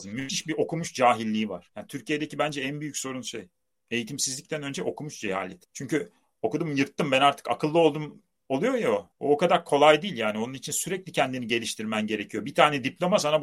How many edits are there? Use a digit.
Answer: 0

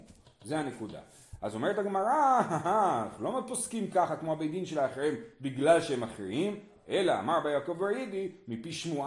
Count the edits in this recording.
0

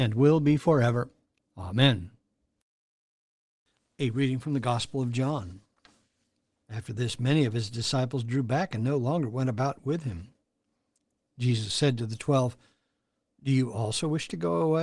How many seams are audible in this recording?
1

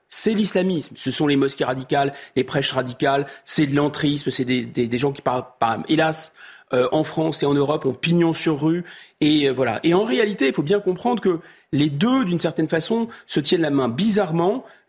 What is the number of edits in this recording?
0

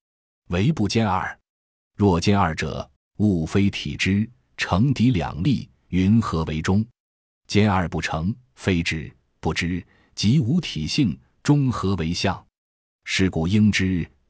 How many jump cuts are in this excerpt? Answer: 1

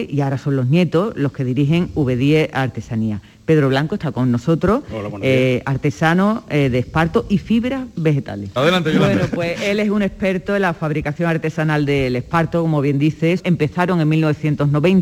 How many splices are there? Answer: 2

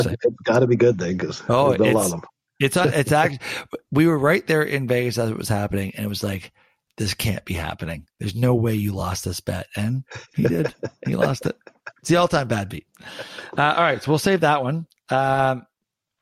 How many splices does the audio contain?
0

